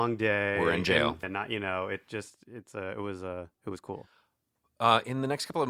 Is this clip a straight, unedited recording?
no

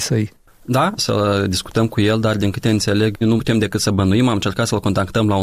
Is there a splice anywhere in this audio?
yes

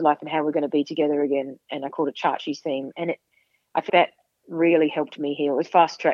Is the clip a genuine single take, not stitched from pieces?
no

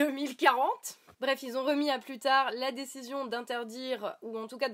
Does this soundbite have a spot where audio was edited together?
yes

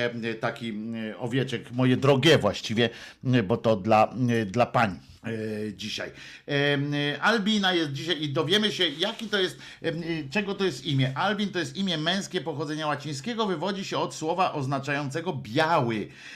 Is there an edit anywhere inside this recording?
yes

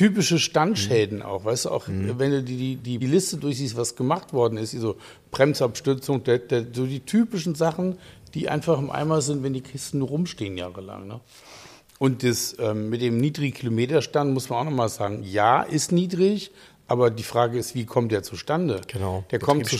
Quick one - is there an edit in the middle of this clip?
yes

